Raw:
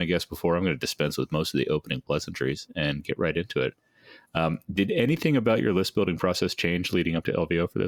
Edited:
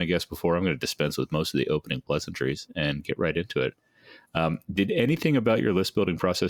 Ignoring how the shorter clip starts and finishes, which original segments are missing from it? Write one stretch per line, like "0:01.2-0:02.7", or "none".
none